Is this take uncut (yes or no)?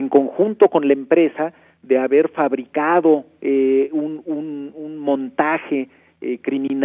yes